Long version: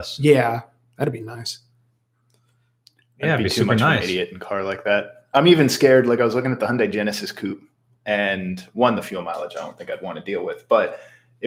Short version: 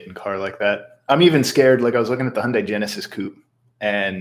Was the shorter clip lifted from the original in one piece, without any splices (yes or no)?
yes